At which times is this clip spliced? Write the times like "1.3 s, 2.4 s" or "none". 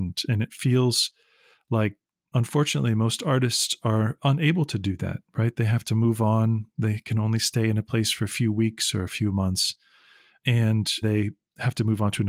11.0 s